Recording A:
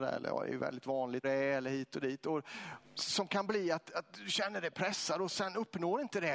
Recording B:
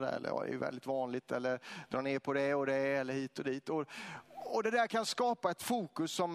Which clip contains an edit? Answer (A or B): A